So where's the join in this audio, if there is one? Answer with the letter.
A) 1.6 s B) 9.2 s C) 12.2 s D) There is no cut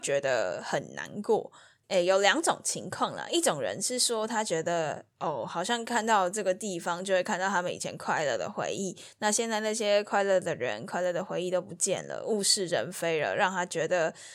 D